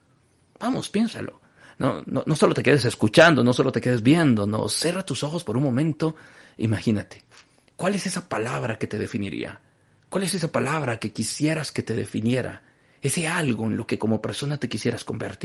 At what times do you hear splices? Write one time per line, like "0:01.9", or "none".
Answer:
0:02.0